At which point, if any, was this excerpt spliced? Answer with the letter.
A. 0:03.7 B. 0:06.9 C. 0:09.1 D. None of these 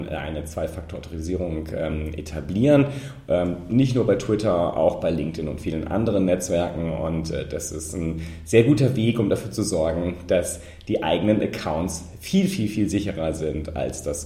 D